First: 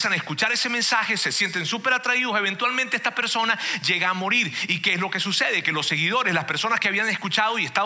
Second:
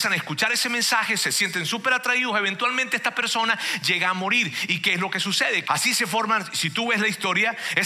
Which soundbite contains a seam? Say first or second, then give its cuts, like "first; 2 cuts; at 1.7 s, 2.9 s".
second; 1 cut; at 5.6 s